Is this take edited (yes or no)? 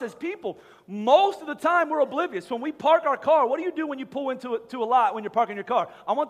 no